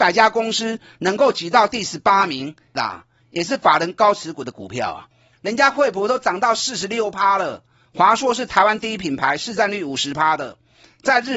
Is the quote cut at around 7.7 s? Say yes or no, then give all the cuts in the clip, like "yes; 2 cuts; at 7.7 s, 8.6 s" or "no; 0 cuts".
no; 2 cuts; at 2.8 s, 5.3 s